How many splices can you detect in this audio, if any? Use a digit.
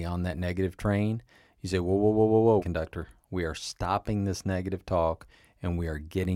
1